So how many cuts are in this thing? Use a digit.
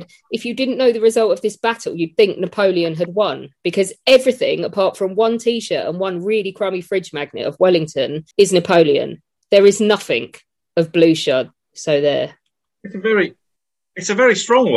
2